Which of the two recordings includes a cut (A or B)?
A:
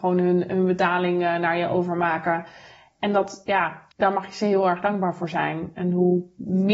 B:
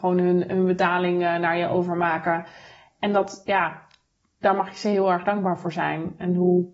A